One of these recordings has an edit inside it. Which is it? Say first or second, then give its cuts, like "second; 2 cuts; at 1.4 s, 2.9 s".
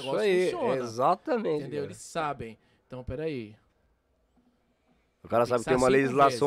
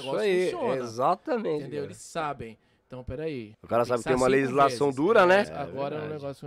second; 2 cuts; at 3.5 s, 5.4 s